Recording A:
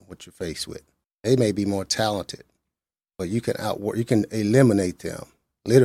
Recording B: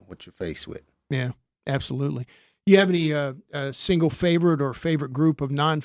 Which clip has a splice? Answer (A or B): A